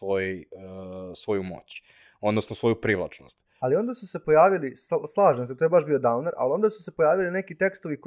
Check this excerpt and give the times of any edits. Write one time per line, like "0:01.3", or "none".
0:03.6